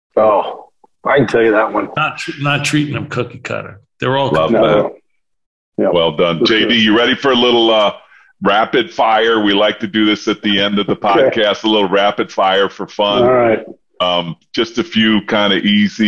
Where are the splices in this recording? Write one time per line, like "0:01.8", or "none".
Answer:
0:02.0